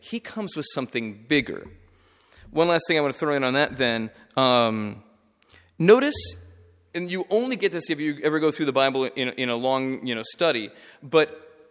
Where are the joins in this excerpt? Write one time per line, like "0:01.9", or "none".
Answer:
none